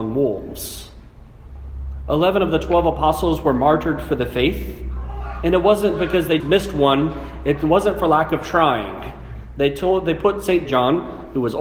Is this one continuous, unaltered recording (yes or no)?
no